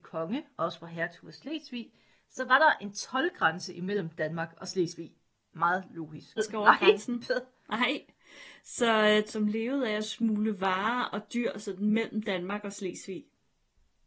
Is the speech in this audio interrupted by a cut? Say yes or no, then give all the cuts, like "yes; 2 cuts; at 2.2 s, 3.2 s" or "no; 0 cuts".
yes; 2 cuts; at 6.4 s, 9.3 s